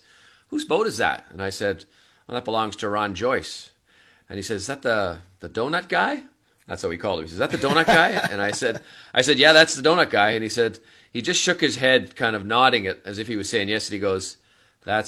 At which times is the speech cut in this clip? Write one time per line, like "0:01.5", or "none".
none